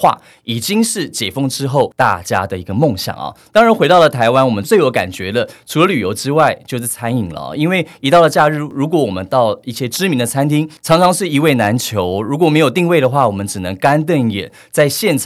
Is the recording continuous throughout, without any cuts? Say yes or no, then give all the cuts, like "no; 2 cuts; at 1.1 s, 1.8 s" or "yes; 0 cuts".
yes; 0 cuts